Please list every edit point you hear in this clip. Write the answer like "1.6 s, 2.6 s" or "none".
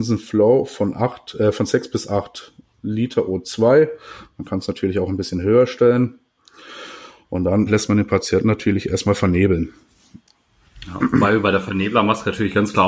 7.7 s